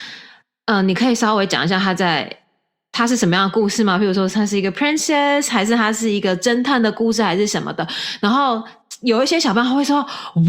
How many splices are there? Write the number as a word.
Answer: zero